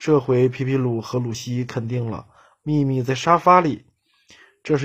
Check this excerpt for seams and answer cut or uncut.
cut